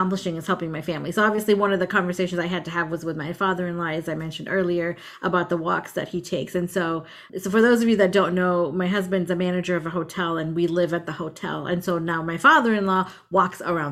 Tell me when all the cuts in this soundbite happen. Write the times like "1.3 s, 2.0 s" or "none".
none